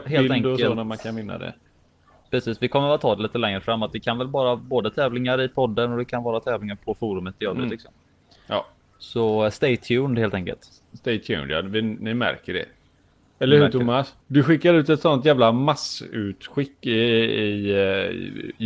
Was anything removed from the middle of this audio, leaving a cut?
no; 0 cuts

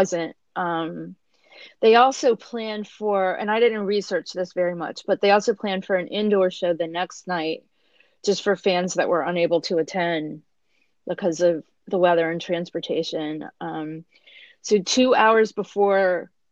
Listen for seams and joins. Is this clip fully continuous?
yes; 0 cuts

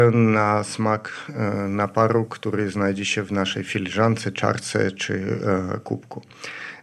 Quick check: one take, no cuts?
yes; 0 cuts

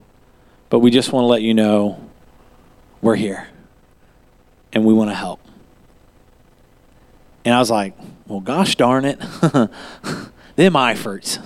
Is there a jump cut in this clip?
no; 0 cuts

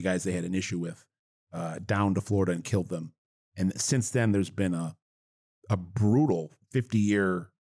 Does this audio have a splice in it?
no; 0 cuts

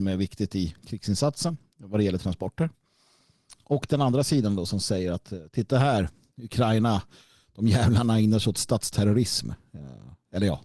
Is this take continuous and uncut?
yes; 0 cuts

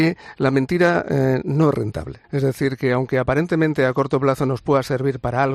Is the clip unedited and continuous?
no; 1 cut; at 2.2 s

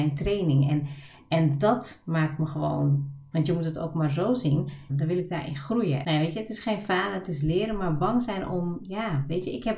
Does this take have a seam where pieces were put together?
yes; 3 cuts; at 3.3 s, 4.9 s, 6.0 s

